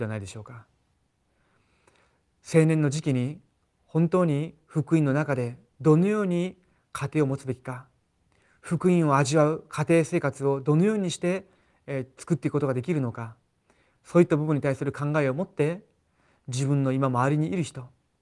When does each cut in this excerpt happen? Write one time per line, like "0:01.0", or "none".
none